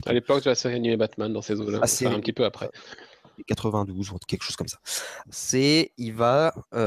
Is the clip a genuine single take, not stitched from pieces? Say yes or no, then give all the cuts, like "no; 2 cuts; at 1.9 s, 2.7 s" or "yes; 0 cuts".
no; 1 cut; at 5.2 s